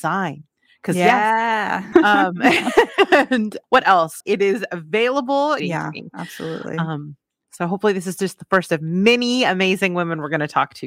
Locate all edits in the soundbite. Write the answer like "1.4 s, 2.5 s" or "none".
1.9 s, 4.2 s, 5.6 s